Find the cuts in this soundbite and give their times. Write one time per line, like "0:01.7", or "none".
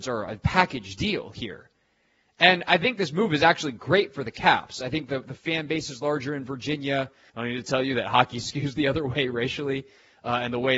0:07.3